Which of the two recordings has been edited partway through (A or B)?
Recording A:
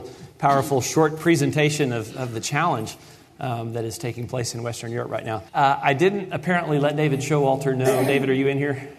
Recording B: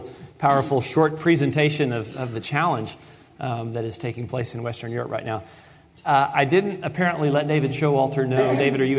A